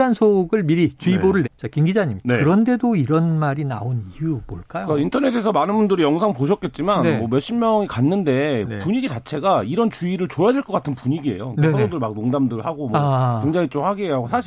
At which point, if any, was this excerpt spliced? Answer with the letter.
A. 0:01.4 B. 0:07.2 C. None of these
A